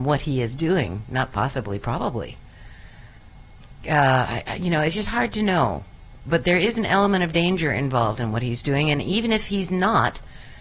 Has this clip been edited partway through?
no; 0 cuts

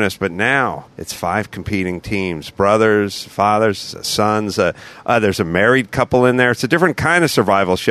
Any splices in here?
yes; 1 cut; at 0.9 s

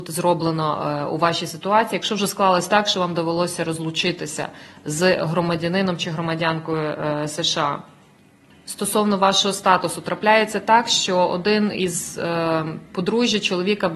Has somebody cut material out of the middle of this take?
yes; 1 cut; at 8.5 s

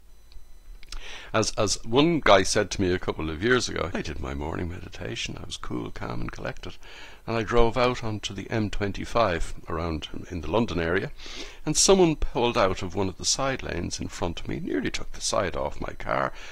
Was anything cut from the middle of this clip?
yes; 1 cut; at 3.9 s

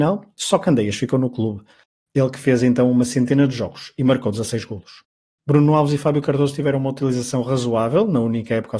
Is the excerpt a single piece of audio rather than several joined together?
yes; 0 cuts

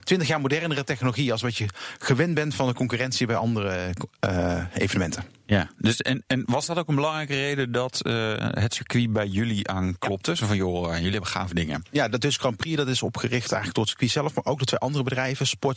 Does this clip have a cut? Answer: no; 0 cuts

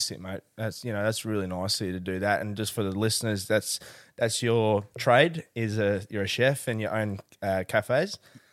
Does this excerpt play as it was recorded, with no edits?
yes; 0 cuts

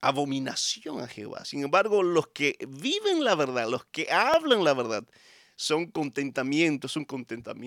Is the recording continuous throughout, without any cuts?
yes; 0 cuts

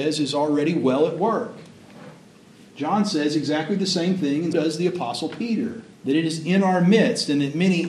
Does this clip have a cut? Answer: yes; 2 cuts; at 4.5 s, 5.9 s

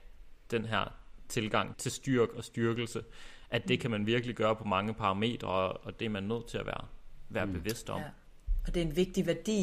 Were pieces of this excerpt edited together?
yes; 1 cut; at 1.7 s

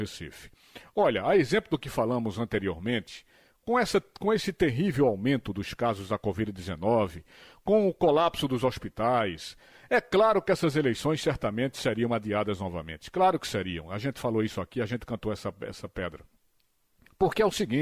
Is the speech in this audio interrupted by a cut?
no; 0 cuts

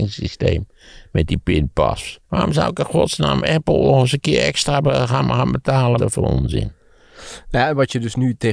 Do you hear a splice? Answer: yes; 2 cuts; at 2.2 s, 6.0 s

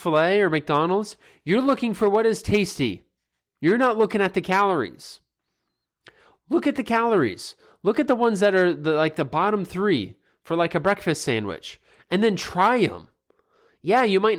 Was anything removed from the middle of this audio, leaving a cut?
no; 0 cuts

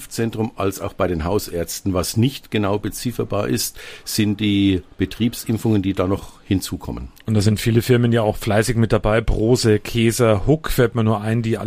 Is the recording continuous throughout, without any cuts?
yes; 0 cuts

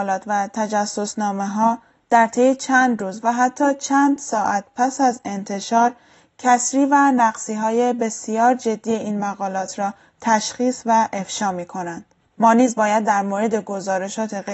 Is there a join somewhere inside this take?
yes; 1 cut; at 12.3 s

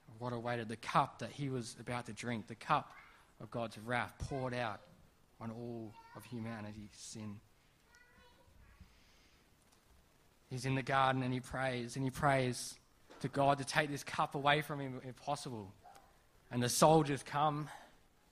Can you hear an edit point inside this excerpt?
yes; 1 cut; at 16.4 s

